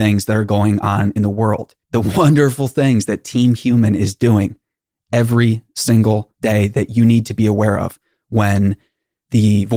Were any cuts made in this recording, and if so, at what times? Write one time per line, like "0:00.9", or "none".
0:01.8